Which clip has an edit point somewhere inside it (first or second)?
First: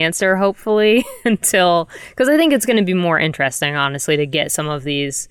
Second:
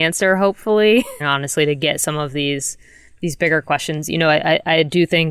second